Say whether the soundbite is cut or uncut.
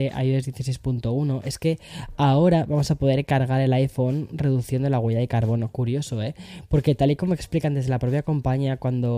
uncut